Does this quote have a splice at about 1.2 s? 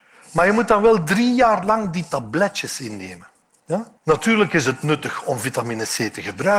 no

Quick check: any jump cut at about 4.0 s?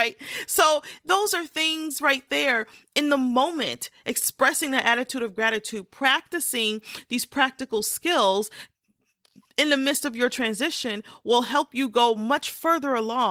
no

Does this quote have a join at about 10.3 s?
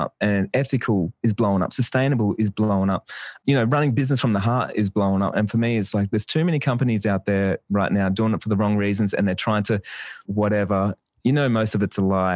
yes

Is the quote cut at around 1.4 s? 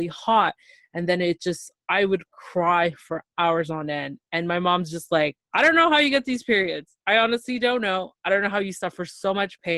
no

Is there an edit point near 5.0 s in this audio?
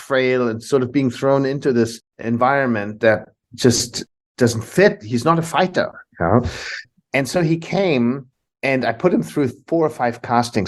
no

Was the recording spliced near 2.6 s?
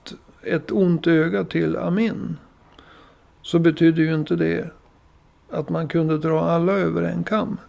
no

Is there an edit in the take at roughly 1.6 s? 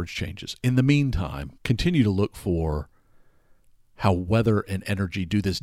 yes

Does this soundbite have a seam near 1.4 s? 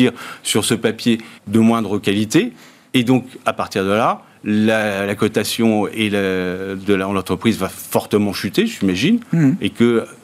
yes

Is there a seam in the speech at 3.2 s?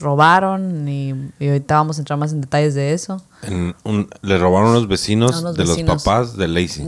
no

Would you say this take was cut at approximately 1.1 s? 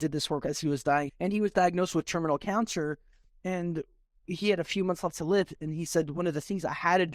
yes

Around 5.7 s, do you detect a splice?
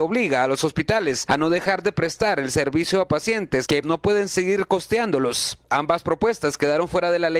no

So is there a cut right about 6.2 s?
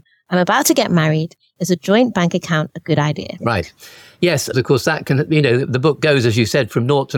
no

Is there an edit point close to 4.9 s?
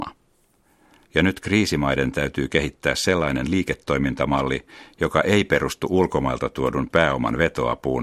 no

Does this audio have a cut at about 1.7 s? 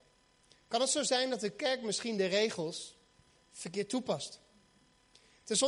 no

